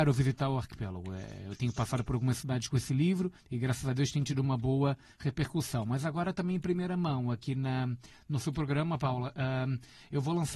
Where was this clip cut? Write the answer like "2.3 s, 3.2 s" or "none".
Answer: none